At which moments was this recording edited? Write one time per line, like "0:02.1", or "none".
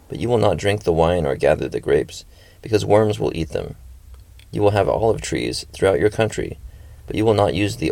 none